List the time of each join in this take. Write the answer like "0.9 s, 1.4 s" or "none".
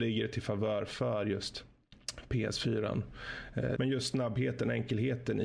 3.8 s